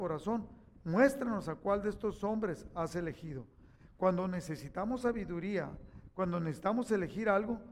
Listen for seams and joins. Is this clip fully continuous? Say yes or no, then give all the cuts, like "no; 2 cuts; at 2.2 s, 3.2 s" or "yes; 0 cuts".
yes; 0 cuts